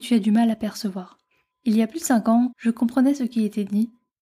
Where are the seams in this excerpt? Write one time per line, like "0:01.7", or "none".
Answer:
0:01.5
0:02.5